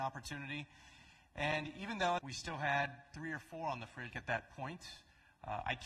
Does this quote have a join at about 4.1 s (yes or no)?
yes